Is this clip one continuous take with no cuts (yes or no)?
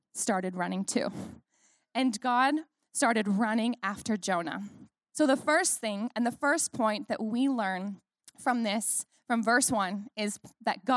no